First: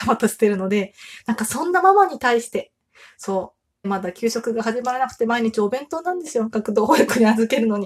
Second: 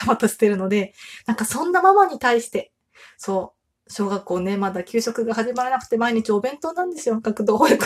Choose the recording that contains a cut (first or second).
first